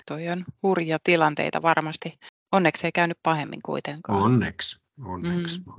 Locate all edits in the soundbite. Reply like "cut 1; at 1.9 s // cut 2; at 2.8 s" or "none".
none